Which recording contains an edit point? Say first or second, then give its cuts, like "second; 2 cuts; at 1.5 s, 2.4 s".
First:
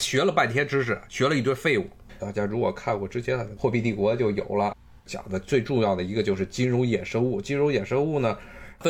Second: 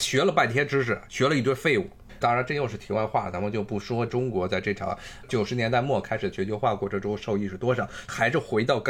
first; 1 cut; at 2.2 s